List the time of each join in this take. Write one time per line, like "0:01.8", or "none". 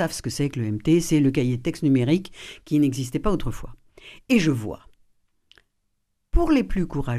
none